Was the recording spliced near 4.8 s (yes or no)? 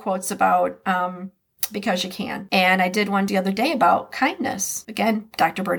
no